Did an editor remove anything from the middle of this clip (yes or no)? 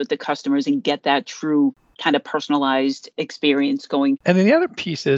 yes